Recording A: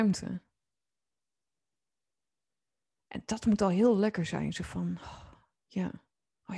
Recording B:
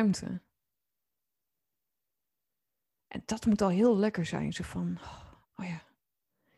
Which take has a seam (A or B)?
B